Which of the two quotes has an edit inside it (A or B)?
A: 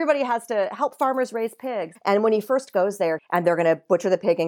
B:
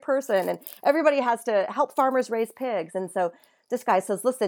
A